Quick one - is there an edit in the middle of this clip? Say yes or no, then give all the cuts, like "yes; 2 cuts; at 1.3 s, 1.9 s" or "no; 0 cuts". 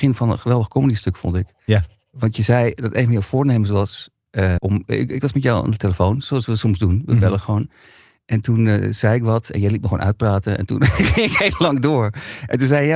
yes; 1 cut; at 4.6 s